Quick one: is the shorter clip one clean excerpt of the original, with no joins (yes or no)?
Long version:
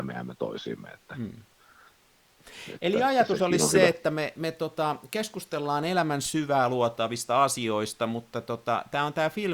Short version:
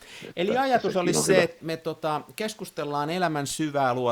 no